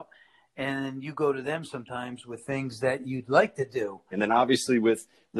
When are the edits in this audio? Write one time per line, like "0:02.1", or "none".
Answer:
0:04.1